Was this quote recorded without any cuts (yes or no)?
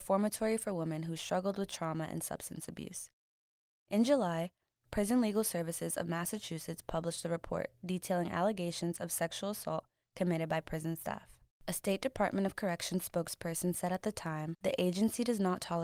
yes